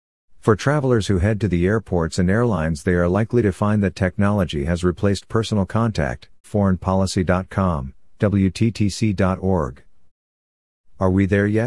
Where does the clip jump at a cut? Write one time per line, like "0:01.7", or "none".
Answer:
0:06.4

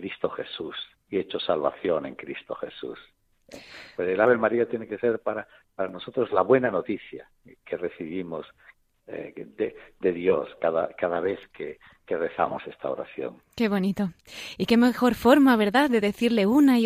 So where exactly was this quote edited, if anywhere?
none

